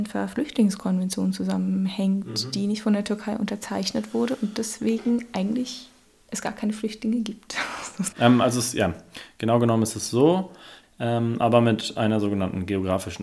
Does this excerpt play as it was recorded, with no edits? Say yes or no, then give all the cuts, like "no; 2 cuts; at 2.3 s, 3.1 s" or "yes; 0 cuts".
no; 2 cuts; at 8.1 s, 10.8 s